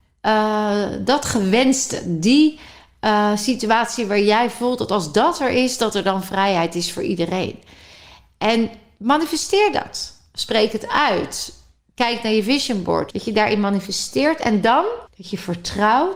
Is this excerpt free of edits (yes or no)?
no